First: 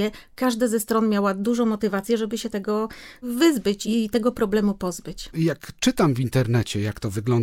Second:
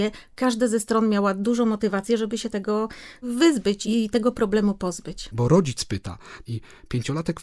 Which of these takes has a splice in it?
second; 2 cuts; at 5.3 s, 6.5 s

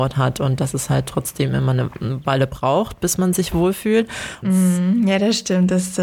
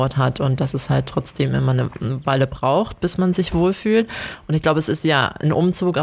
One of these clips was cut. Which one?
first; 1 cut; at 4.4 s

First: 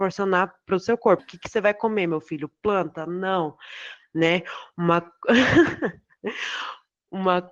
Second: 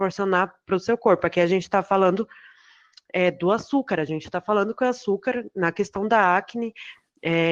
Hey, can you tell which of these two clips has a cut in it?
first; 1 cut; at 1.2 s

